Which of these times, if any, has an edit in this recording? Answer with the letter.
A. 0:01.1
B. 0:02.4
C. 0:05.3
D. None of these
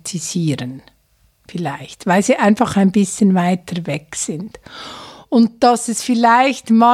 D